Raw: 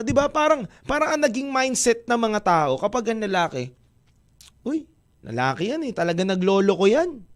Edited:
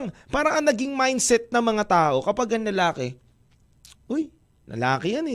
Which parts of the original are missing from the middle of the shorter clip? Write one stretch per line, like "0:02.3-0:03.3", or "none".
none